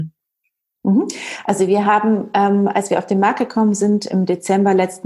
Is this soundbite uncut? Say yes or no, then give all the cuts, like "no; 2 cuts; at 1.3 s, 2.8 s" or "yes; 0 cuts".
yes; 0 cuts